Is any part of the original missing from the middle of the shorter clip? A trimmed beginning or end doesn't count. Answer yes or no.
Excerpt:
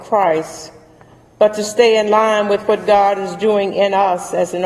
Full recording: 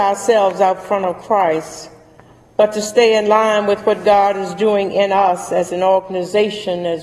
no